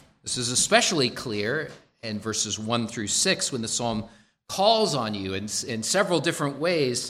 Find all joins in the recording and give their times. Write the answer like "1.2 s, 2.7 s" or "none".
none